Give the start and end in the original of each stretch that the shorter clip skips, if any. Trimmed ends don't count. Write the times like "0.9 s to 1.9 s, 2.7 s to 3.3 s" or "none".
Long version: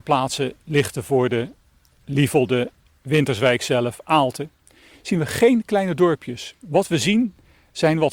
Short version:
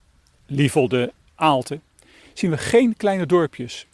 2.9 s to 4.0 s